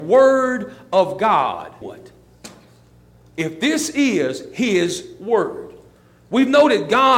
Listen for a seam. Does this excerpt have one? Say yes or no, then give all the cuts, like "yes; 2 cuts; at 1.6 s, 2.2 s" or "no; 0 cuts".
yes; 1 cut; at 1.8 s